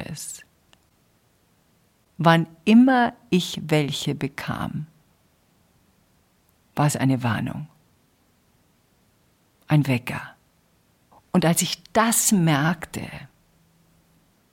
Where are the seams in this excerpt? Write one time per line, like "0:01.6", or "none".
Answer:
0:11.1